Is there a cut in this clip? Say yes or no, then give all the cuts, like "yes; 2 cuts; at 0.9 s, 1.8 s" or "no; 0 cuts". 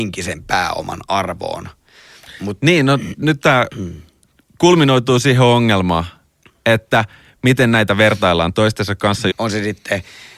yes; 1 cut; at 9.3 s